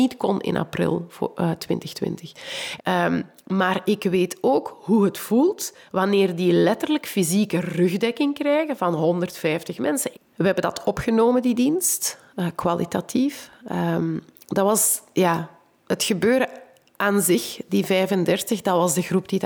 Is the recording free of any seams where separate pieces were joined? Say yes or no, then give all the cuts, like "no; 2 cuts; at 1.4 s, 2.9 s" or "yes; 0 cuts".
no; 2 cuts; at 2.8 s, 10.1 s